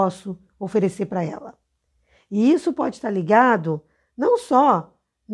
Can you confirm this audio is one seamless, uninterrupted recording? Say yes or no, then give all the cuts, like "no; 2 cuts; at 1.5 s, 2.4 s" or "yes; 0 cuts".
yes; 0 cuts